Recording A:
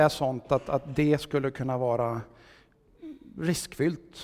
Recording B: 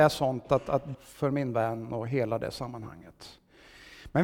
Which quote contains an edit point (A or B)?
B